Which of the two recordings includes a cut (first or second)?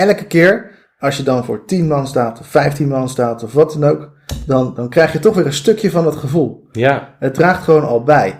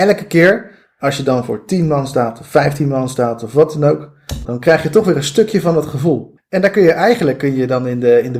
second